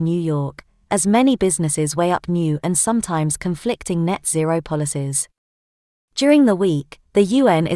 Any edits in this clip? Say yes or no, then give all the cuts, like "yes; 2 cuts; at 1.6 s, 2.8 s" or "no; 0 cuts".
no; 0 cuts